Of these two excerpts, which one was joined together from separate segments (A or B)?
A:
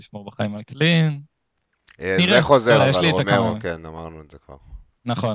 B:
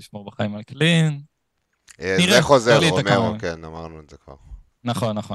B